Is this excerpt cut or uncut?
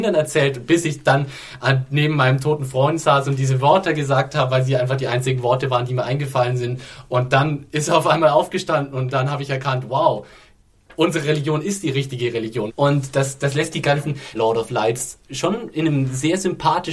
cut